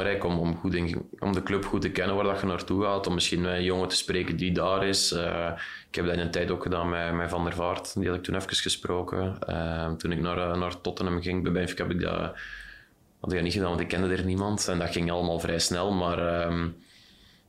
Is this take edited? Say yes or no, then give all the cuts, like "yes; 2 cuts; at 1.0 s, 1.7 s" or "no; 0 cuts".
yes; 1 cut; at 4.4 s